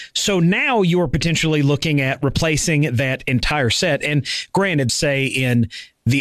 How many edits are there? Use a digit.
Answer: 1